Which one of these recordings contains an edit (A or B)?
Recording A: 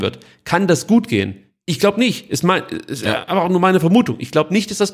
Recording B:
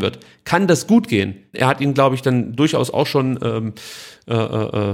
B